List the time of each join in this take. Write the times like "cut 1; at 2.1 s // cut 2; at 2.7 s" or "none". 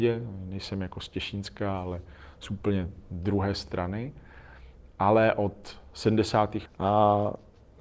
cut 1; at 6.7 s